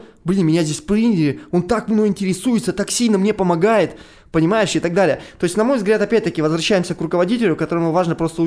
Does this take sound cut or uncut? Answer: uncut